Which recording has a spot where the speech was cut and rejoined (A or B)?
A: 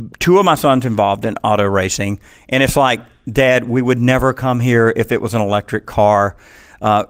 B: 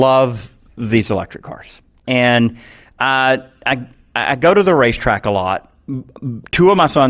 B